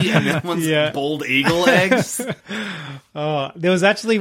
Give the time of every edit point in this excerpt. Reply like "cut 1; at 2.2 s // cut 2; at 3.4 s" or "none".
cut 1; at 2.4 s

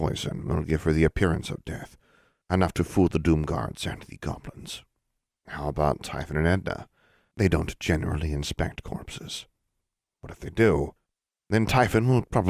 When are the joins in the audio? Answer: none

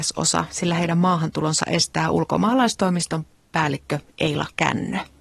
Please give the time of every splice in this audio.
none

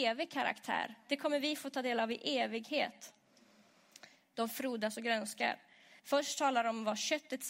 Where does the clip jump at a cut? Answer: cut 1; at 4.3 s // cut 2; at 6.0 s

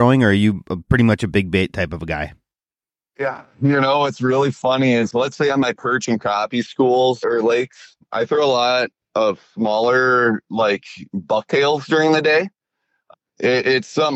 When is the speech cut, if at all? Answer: cut 1; at 5.1 s

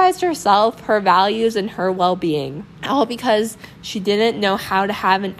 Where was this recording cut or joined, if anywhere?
cut 1; at 2.7 s

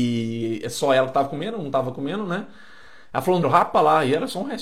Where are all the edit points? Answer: cut 1; at 3.4 s

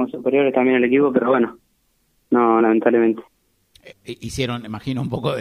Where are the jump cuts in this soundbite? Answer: cut 1; at 2.6 s // cut 2; at 3.9 s

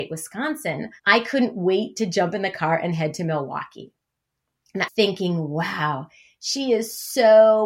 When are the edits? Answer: cut 1; at 1.0 s // cut 2; at 4.9 s

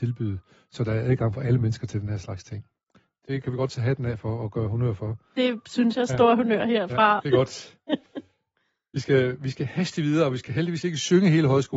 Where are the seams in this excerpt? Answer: cut 1; at 7.2 s

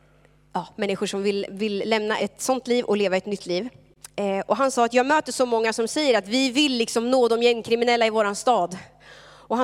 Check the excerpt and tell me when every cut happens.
cut 1; at 2.2 s

